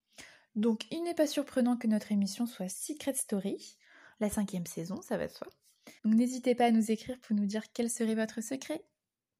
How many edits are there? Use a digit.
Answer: 1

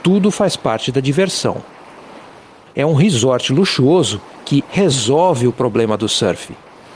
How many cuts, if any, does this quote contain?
2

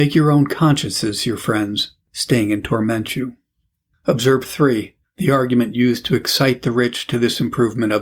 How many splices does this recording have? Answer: 1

